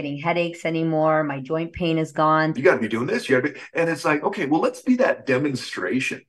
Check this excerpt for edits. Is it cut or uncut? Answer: cut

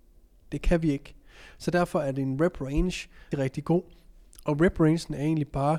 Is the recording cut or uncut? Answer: cut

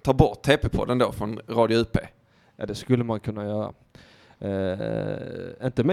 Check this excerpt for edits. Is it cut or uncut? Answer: uncut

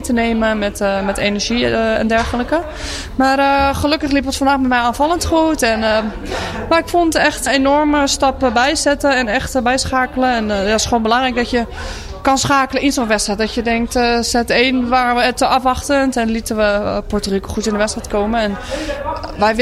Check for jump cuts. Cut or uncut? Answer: cut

